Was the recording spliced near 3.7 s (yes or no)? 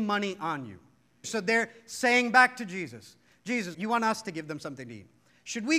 yes